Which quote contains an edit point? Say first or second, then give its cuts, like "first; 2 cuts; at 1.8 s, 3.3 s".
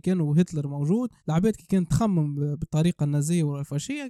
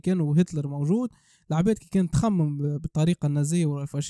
first; 1 cut; at 1.2 s